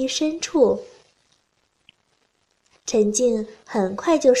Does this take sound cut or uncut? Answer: cut